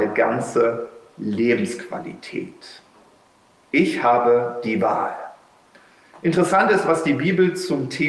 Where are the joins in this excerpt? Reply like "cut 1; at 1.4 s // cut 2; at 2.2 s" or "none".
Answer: cut 1; at 3.5 s